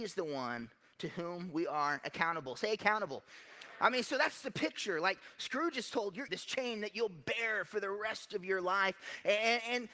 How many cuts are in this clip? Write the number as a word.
one